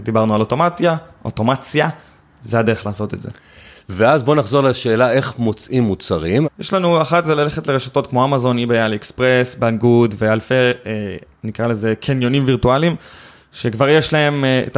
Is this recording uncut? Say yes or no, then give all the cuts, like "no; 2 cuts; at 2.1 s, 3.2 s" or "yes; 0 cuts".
no; 1 cut; at 6.4 s